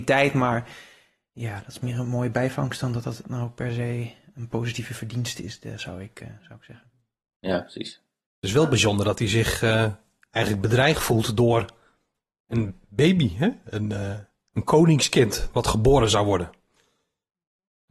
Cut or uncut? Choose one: uncut